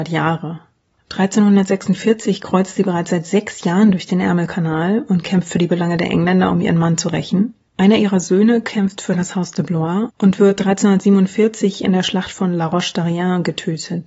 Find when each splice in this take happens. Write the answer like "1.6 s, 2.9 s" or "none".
7.7 s, 10.1 s